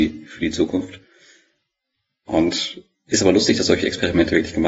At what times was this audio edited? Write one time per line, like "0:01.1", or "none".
none